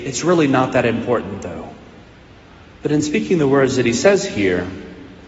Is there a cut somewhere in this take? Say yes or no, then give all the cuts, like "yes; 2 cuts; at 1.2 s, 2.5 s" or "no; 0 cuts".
yes; 1 cut; at 2.7 s